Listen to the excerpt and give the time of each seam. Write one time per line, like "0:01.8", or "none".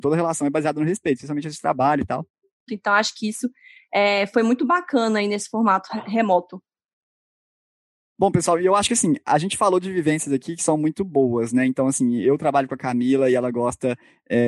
0:02.7